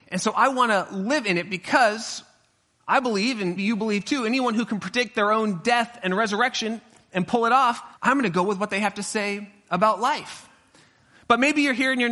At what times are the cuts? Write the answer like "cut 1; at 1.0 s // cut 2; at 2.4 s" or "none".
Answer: cut 1; at 3.6 s // cut 2; at 8.0 s